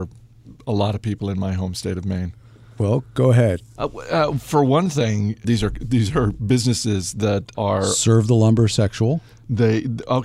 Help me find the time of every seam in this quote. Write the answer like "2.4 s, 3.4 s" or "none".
3.8 s, 5.4 s, 7.5 s